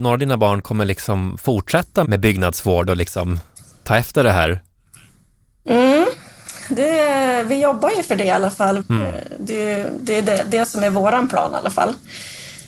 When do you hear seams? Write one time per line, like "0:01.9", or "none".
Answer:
0:02.0
0:08.8